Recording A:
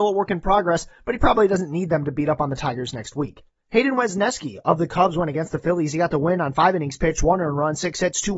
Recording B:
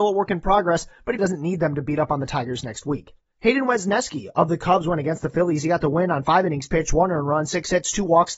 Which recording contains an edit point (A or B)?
B